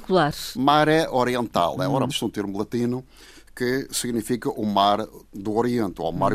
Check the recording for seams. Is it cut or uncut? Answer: cut